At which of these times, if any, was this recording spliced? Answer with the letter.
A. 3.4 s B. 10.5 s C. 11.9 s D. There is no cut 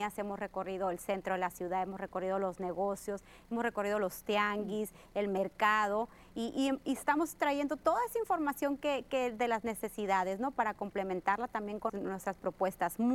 C